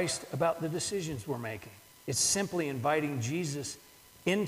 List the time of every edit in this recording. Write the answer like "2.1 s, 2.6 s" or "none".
1.9 s